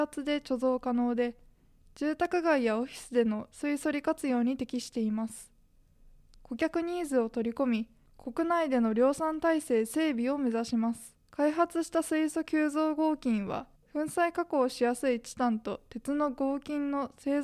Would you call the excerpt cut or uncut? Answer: cut